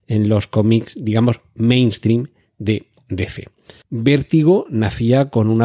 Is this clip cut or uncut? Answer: cut